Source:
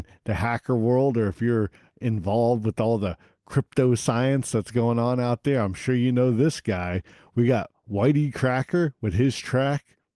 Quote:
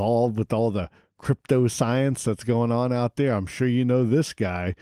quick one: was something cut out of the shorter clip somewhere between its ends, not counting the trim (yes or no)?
no